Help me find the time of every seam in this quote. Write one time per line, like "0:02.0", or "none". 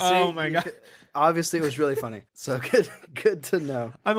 0:02.3